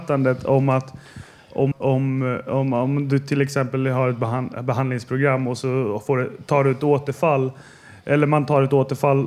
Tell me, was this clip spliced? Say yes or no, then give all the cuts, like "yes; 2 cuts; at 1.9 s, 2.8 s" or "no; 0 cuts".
yes; 1 cut; at 1.7 s